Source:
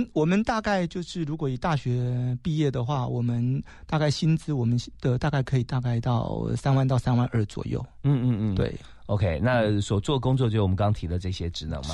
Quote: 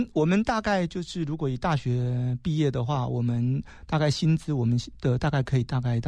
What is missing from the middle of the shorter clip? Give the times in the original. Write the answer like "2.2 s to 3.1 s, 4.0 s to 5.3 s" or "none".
none